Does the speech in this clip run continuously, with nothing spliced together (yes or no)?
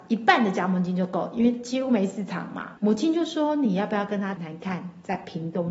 no